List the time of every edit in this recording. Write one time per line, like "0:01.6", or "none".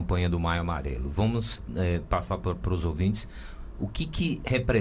none

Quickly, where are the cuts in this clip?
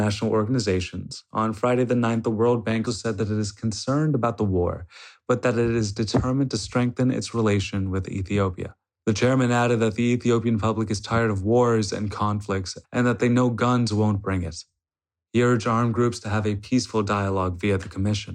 0:02.9
0:09.0
0:12.8

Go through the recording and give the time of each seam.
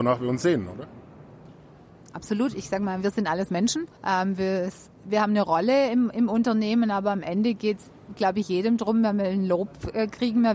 0:03.9

